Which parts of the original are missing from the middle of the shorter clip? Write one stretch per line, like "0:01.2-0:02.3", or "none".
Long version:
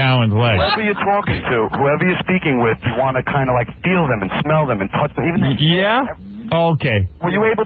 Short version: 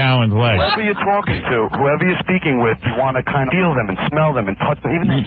0:03.5-0:03.8

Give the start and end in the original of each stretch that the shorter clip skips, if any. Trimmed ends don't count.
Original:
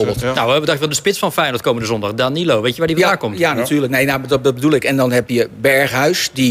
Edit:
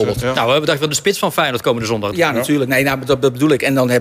0:02.1-0:03.3

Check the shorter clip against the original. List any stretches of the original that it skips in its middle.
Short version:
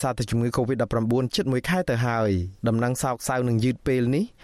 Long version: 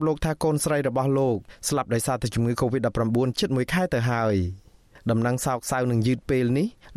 0:04.6-0:05.0

